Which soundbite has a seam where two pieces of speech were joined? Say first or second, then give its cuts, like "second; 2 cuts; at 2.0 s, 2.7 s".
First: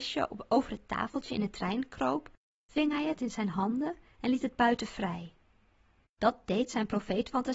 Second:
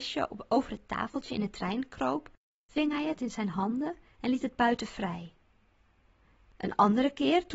first; 1 cut; at 6.0 s